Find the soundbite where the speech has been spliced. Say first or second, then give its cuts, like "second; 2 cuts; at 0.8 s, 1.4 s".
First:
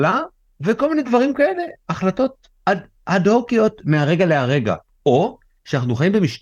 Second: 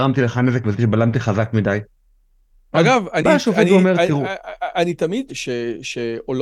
second; 1 cut; at 5.3 s